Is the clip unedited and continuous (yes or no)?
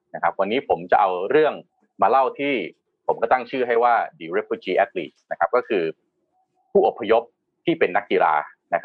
yes